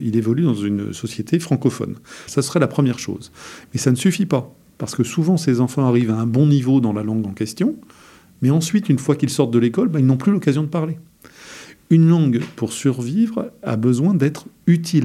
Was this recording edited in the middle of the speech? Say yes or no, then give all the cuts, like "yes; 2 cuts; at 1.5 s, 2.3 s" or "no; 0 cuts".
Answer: yes; 1 cut; at 2.3 s